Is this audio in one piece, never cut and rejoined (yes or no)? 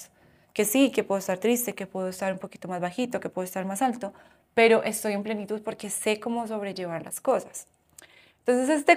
yes